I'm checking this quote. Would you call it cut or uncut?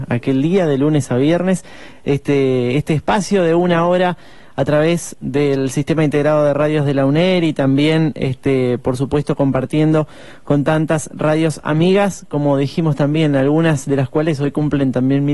uncut